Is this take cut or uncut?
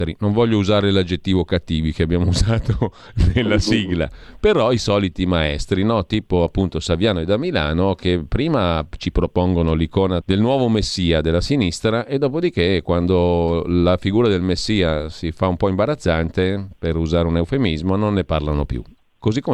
cut